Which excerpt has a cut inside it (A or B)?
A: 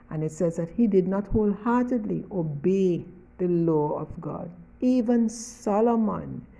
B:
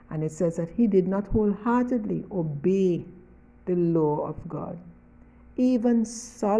A